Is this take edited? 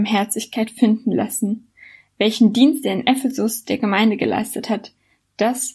no; 0 cuts

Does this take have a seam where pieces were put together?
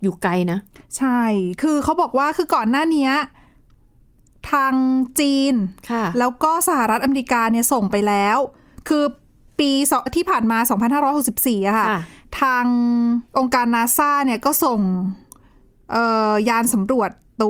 yes; 2 cuts; at 10.1 s, 13.3 s

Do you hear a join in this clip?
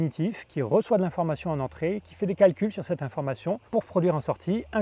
yes; 1 cut; at 3.7 s

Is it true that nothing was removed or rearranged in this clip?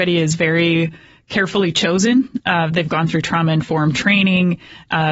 yes; 0 cuts

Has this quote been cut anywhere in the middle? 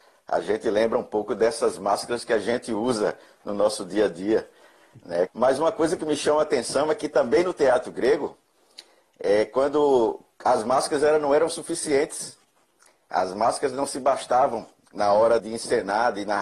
yes; 2 cuts; at 5.3 s, 15.4 s

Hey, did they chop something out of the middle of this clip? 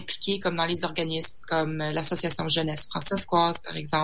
no; 0 cuts

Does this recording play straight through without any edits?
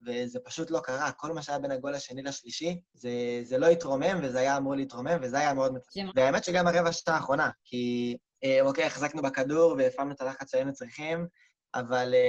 no; 1 cut; at 6.1 s

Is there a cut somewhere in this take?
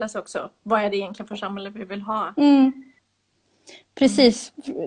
no; 0 cuts

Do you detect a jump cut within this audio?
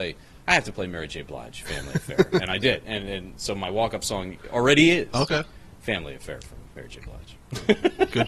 no; 0 cuts

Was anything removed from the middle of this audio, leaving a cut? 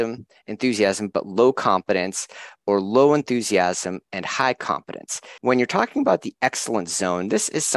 yes; 1 cut; at 5.4 s

